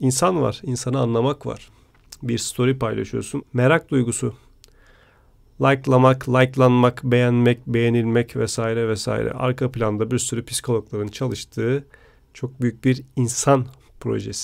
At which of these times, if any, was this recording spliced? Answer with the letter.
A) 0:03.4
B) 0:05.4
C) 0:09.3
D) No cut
A